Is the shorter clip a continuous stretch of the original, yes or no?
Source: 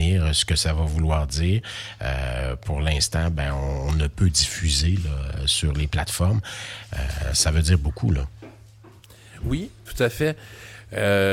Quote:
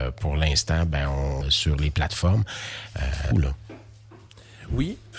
no